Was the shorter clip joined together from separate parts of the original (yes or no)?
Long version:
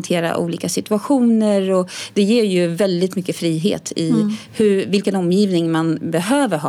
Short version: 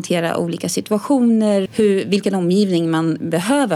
yes